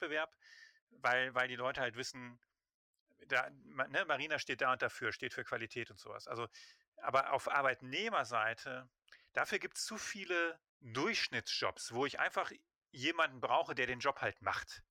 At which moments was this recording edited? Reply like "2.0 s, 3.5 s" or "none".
10.7 s